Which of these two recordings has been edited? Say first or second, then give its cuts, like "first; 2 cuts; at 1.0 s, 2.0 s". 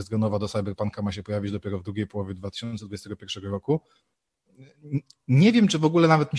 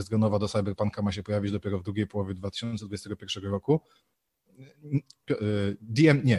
second; 1 cut; at 5.2 s